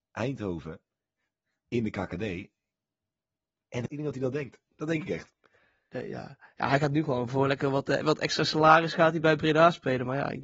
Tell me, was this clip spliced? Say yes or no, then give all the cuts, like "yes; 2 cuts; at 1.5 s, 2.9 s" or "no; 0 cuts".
yes; 2 cuts; at 3.9 s, 9.2 s